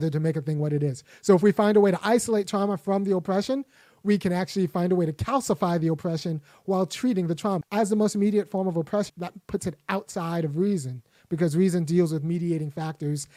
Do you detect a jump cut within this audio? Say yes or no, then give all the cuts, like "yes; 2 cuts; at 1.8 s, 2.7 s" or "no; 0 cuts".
yes; 2 cuts; at 7.6 s, 9.1 s